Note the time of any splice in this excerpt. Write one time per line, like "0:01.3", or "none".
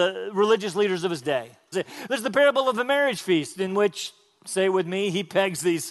0:01.7